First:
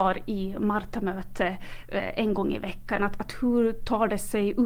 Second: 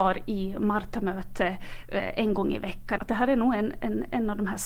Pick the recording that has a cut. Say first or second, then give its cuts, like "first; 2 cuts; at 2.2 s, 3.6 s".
second; 1 cut; at 3.0 s